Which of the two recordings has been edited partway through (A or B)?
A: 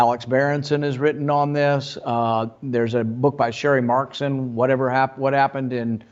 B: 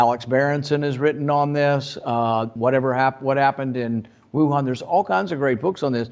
B